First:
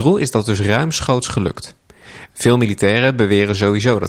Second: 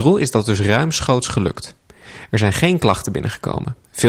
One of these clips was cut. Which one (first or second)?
first